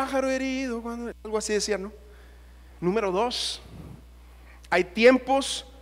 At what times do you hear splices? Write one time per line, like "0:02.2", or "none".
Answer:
0:02.7